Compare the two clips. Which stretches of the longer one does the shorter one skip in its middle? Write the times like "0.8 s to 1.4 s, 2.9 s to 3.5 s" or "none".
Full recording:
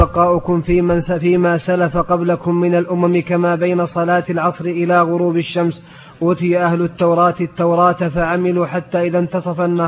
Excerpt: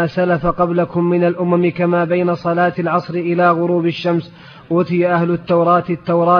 none